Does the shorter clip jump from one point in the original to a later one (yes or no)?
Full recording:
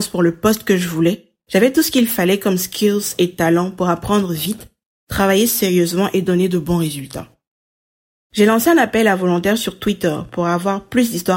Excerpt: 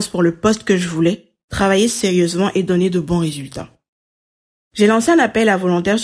yes